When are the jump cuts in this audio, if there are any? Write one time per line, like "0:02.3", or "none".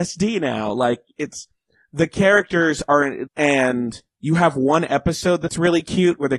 0:03.3